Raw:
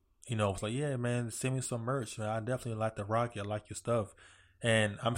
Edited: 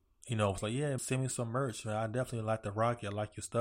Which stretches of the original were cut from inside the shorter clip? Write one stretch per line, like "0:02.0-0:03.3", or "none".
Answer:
0:01.0-0:01.3